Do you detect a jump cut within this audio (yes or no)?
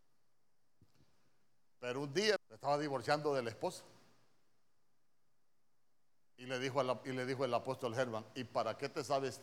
yes